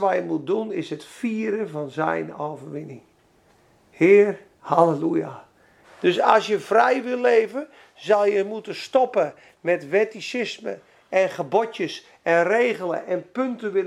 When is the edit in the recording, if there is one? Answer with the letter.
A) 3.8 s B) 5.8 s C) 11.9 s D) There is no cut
B